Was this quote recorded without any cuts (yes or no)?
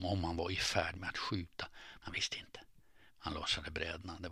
no